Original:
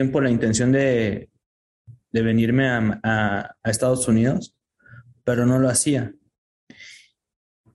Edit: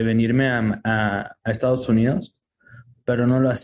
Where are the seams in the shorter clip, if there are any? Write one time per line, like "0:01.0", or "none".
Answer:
none